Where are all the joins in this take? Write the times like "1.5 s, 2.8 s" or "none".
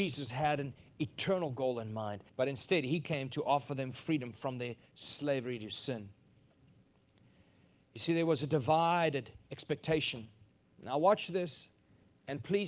2.3 s, 10.7 s